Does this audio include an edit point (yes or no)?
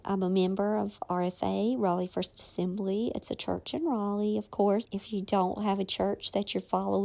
yes